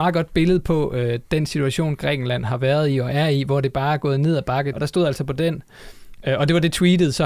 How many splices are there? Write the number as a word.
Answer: one